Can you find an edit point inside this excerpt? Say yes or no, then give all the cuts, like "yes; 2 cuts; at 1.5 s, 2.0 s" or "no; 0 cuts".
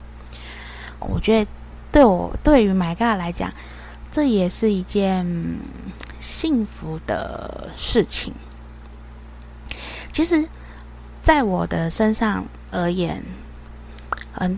yes; 1 cut; at 1.0 s